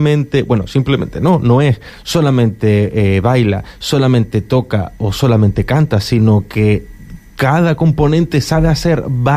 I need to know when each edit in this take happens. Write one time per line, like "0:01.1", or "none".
none